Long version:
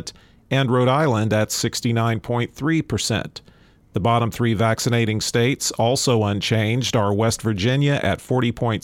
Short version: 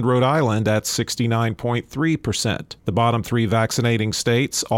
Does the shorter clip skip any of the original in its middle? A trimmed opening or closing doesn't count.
yes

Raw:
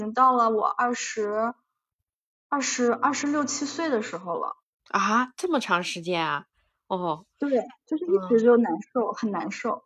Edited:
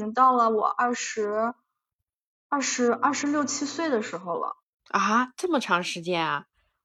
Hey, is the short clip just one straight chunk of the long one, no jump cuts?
yes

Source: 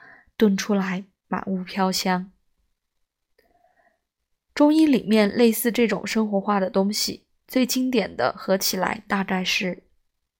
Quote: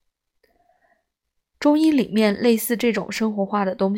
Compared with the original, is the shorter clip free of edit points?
yes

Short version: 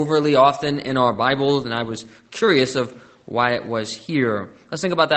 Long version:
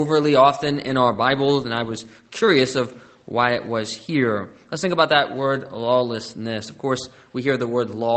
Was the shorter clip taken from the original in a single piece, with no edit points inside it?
yes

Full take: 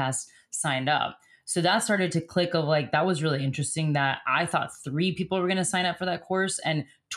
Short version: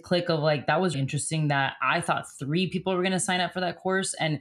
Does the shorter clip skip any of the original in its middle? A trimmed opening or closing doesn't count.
yes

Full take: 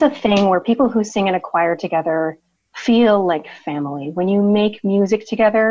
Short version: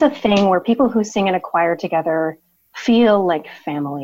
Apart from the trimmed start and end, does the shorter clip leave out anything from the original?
no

